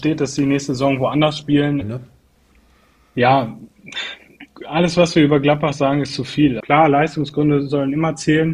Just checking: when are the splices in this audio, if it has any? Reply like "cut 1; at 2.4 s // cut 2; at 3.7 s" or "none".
cut 1; at 1.8 s // cut 2; at 6.6 s